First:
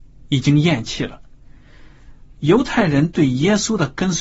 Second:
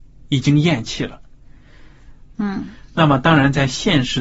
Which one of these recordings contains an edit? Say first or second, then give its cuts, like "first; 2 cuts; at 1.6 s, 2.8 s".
second; 1 cut; at 2.3 s